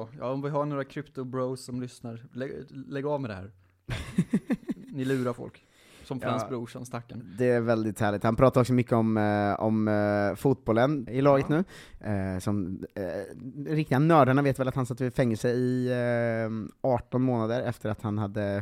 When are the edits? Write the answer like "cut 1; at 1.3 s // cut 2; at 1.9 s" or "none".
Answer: cut 1; at 11.1 s